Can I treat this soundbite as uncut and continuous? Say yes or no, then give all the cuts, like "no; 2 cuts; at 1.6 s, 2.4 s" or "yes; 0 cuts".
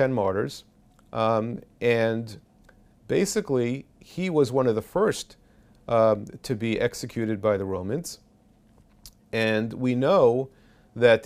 yes; 0 cuts